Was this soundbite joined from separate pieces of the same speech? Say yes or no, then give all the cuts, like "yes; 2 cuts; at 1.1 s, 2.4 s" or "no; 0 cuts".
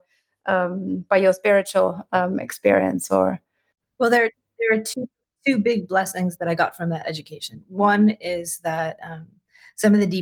no; 0 cuts